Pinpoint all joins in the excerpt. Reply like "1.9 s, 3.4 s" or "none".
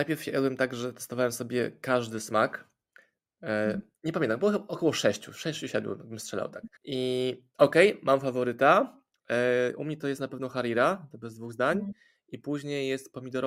6.8 s